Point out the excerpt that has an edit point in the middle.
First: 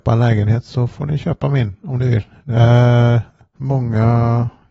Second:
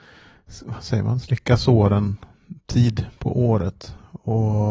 first; 1 cut; at 3.6 s

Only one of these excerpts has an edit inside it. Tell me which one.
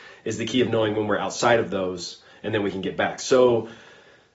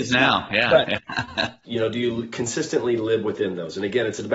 second; 1 cut; at 1.6 s

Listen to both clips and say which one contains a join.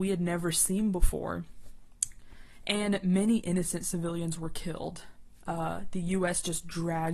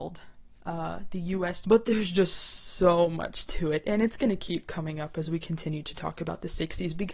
second; 1 cut; at 1.6 s

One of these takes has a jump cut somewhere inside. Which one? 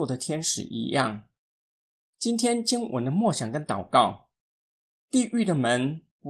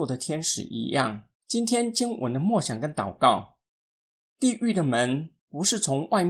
second; 1 cut; at 1.3 s

